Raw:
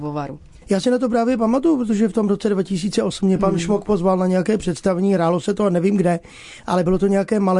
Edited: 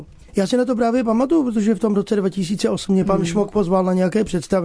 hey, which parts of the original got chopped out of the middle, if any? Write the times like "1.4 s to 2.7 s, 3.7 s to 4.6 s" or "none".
none